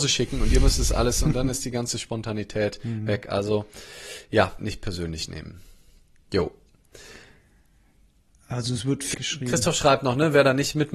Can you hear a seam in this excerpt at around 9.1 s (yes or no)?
yes